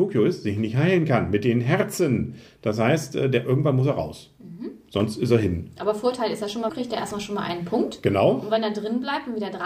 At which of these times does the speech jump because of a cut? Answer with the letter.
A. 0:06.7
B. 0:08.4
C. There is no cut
A